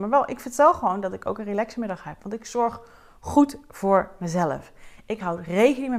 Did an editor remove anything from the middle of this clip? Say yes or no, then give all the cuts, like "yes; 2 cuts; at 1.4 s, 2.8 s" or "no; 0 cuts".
yes; 1 cut; at 5.0 s